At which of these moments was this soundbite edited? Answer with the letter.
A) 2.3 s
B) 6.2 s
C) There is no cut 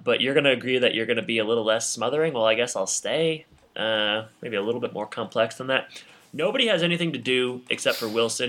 C